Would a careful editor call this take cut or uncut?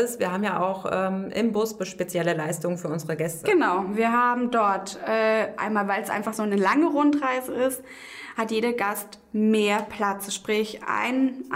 uncut